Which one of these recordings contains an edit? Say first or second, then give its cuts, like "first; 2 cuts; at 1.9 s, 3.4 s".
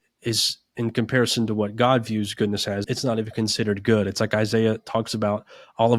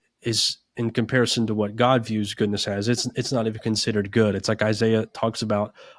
first; 1 cut; at 2.8 s